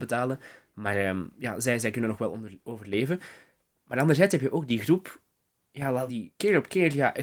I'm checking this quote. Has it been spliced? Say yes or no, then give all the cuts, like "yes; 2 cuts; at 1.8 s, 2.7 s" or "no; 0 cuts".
yes; 1 cut; at 6.1 s